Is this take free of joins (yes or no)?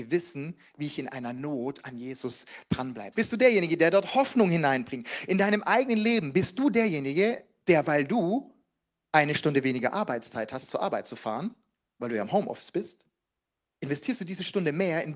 no